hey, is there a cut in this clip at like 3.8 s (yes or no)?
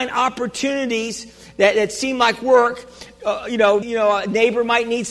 yes